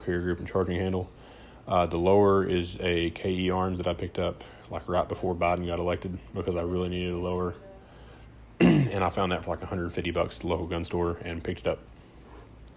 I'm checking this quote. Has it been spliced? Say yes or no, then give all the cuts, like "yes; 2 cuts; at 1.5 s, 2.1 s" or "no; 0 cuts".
no; 0 cuts